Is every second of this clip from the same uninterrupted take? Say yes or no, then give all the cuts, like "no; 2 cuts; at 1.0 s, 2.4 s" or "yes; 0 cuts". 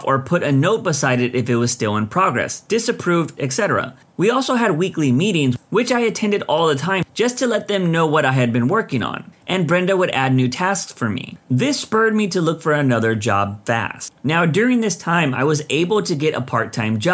no; 2 cuts; at 3.4 s, 11.4 s